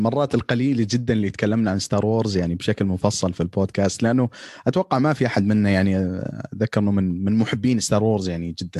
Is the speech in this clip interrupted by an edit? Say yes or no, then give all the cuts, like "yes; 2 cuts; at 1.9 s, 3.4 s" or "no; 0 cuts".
no; 0 cuts